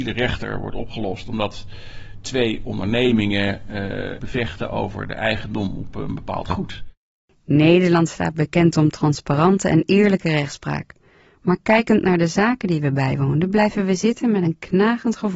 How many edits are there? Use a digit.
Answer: 1